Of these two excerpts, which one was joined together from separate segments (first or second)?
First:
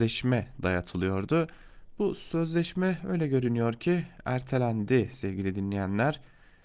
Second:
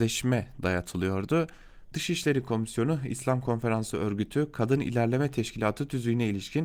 second